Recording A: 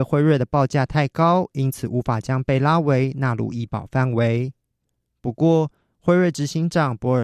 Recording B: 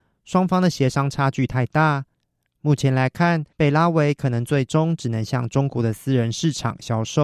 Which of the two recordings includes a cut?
B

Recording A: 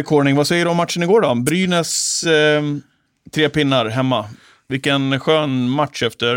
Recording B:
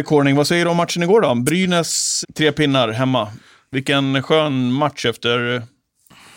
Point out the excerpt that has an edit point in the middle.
B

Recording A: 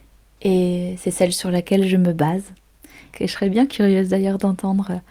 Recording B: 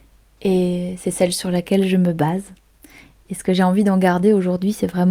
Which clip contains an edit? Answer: A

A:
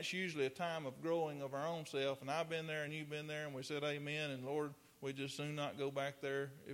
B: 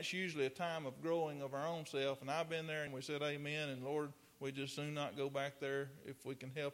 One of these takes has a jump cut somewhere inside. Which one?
B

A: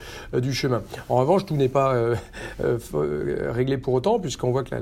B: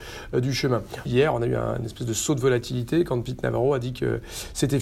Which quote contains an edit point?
B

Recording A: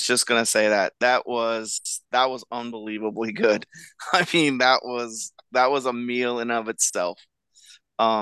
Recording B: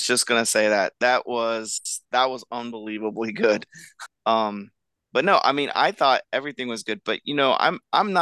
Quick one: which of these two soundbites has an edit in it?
B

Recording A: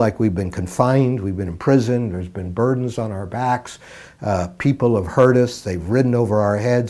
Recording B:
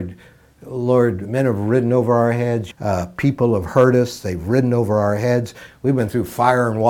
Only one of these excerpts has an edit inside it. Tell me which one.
B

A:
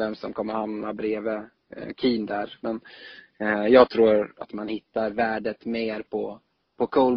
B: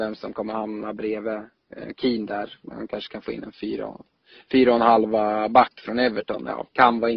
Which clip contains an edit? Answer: A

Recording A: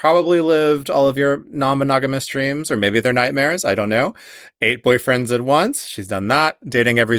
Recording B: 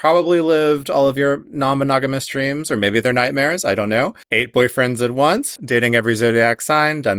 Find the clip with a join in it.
B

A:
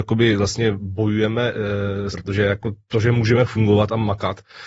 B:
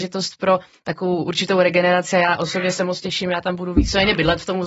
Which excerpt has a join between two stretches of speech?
A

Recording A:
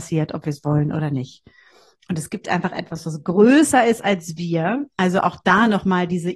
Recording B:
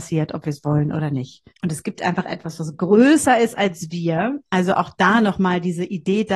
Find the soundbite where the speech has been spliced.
B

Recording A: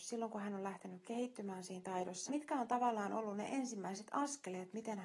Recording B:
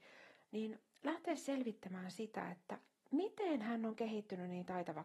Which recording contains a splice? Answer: A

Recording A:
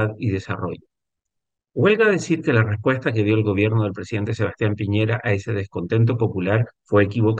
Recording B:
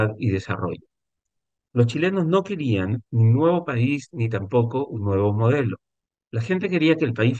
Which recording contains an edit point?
B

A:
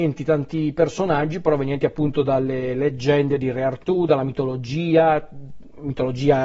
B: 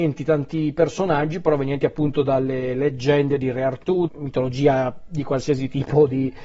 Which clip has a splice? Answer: B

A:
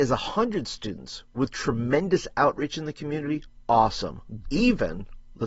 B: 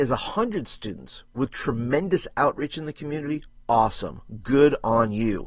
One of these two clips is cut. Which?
A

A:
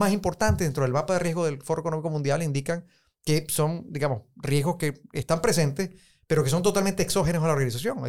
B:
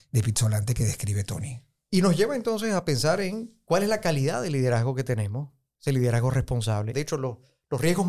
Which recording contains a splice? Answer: B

